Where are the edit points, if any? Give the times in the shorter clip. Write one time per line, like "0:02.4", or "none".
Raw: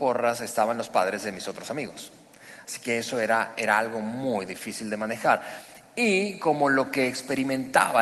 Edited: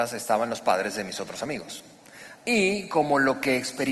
0:02.3